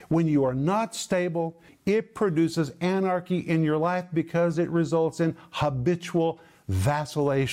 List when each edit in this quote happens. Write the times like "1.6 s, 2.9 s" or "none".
1.7 s